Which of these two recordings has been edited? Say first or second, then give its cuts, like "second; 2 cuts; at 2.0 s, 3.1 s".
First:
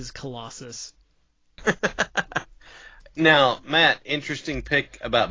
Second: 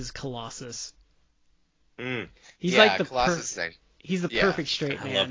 first; 1 cut; at 1.6 s